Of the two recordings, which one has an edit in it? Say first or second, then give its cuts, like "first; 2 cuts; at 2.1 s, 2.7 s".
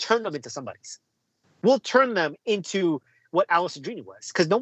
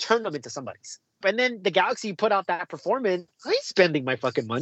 second; 2 cuts; at 1.2 s, 3.3 s